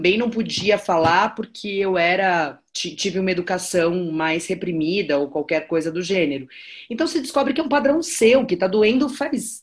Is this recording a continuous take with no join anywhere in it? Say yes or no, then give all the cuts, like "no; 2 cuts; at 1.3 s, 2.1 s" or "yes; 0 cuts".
yes; 0 cuts